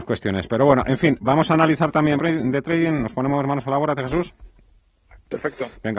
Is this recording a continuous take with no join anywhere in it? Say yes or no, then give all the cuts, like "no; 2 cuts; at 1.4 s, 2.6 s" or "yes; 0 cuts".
no; 2 cuts; at 2.2 s, 4.0 s